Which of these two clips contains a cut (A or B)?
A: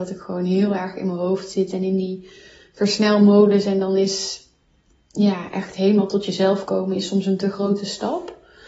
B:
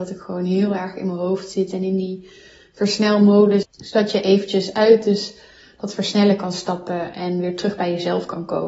B